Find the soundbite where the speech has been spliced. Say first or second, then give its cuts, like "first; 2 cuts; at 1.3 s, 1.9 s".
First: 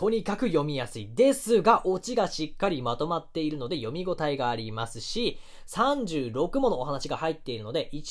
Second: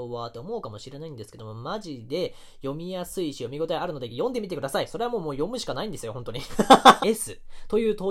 second; 1 cut; at 7.0 s